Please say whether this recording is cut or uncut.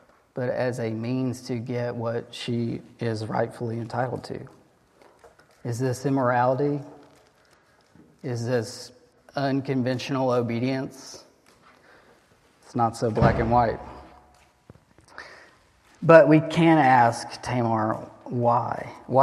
uncut